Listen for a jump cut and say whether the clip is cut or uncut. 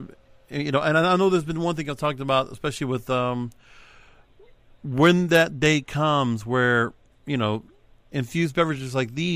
uncut